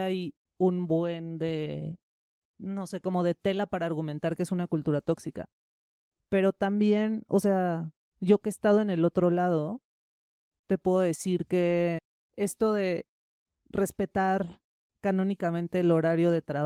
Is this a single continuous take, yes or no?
yes